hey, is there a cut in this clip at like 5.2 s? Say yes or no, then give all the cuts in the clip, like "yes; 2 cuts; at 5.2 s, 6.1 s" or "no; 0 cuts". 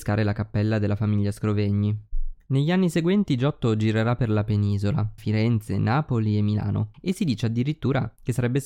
yes; 1 cut; at 5.2 s